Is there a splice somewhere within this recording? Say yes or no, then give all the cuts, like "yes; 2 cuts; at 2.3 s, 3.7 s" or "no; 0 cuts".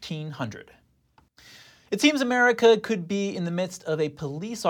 no; 0 cuts